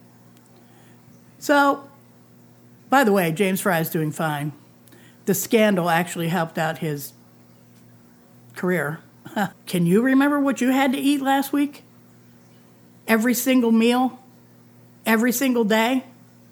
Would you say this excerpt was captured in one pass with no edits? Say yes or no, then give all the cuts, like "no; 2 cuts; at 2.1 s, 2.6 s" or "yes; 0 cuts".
no; 1 cut; at 9.5 s